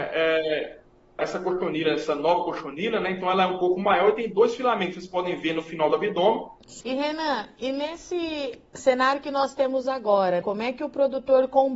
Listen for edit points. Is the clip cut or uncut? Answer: cut